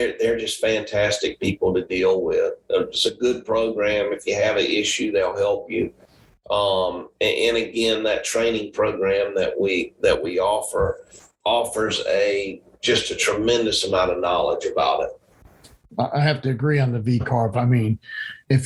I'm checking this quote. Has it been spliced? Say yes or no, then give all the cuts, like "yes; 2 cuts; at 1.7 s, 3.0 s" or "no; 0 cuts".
no; 0 cuts